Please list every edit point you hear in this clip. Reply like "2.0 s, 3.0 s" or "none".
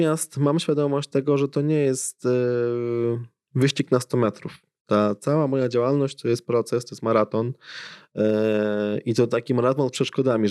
none